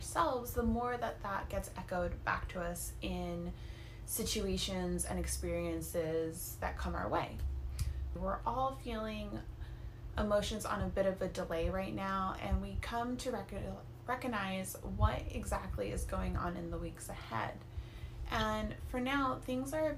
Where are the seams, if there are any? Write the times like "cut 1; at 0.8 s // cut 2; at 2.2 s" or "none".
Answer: cut 1; at 8.2 s